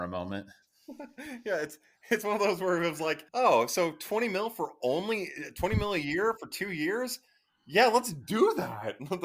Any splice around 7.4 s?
no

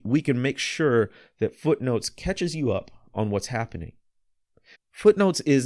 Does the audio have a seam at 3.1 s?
no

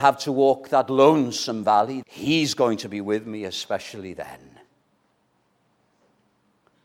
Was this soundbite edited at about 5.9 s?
no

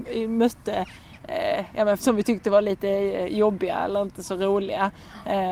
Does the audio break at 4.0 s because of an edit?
no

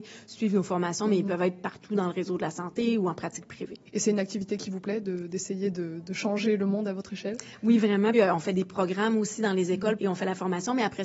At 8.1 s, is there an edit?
yes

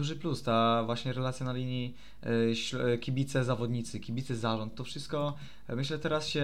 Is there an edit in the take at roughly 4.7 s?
no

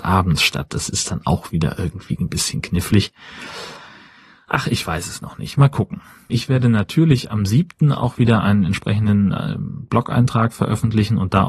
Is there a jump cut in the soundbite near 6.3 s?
yes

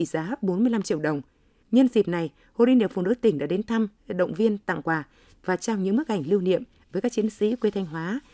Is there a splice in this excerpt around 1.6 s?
yes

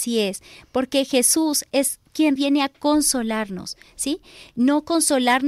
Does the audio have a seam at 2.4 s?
yes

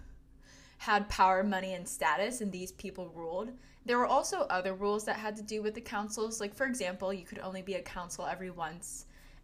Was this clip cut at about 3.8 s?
yes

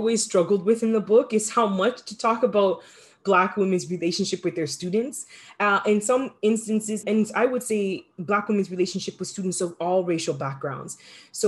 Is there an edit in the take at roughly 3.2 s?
no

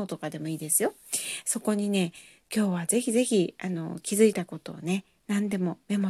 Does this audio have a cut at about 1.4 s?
no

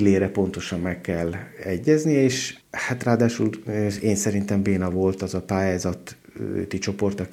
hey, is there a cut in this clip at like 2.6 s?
yes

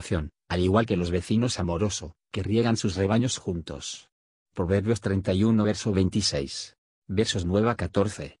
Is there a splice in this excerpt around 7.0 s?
yes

